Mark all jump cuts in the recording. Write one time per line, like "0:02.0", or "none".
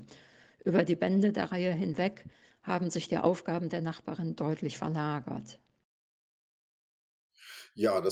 none